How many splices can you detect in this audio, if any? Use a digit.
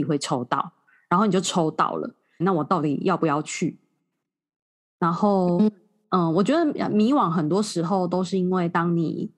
1